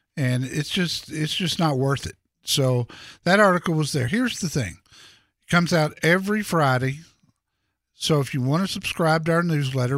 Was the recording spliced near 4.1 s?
no; 0 cuts

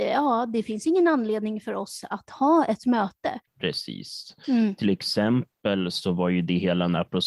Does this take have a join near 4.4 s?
yes; 1 cut; at 4.4 s

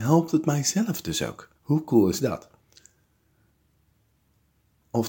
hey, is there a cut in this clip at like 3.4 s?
no; 1 cut; at 1.6 s

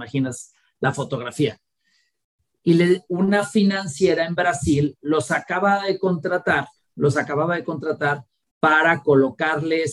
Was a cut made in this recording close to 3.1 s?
yes; 1 cut; at 3.1 s

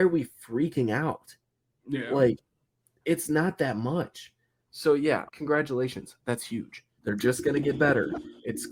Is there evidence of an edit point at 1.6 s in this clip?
no; 2 cuts; at 5.3 s, 7.0 s

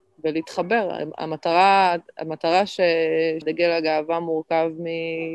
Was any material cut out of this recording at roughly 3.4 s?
yes; 1 cut; at 3.4 s

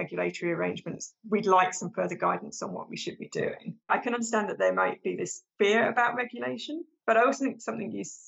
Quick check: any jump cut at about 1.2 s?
no; 2 cuts; at 3.8 s, 5.5 s

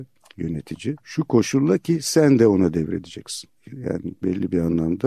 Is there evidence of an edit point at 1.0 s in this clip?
yes; 1 cut; at 1.0 s

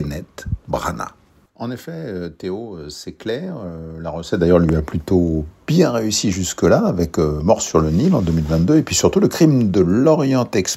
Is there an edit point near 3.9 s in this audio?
no; 1 cut; at 1.5 s

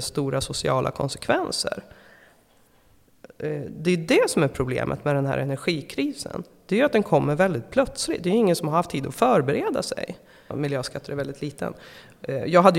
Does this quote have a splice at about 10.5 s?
yes; 1 cut; at 10.5 s

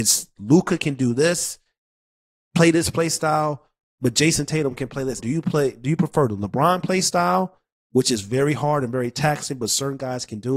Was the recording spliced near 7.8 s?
no; 1 cut; at 5.2 s

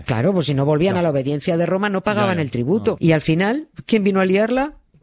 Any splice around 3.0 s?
yes; 1 cut; at 3.0 s

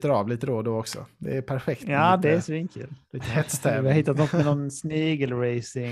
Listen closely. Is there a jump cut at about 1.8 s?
no; 0 cuts

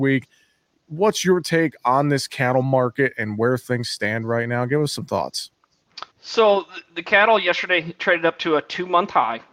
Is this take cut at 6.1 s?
yes; 1 cut; at 6.1 s

